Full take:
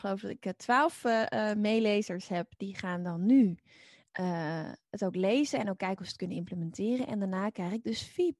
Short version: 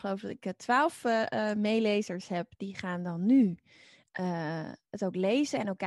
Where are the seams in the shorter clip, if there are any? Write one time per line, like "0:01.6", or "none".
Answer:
none